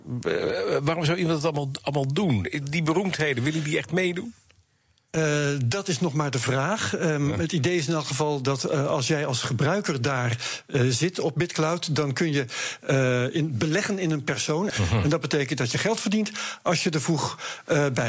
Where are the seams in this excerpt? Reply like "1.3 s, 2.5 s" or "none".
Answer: 14.7 s

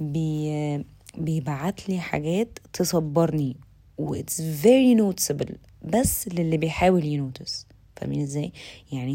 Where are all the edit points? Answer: none

